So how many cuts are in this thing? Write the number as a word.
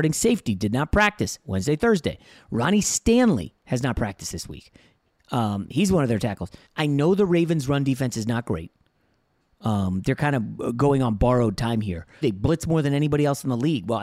two